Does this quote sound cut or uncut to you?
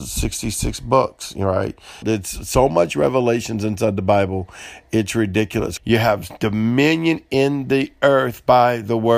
cut